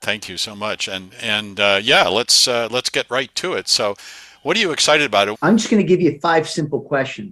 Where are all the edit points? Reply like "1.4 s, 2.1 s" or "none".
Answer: 5.3 s